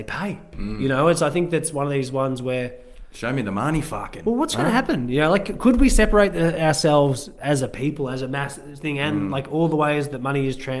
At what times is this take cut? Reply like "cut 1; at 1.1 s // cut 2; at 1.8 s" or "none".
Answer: none